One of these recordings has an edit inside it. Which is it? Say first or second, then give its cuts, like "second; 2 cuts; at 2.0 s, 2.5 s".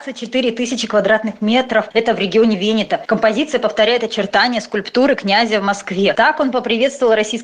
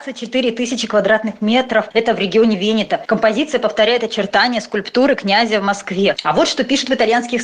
second; 1 cut; at 6.1 s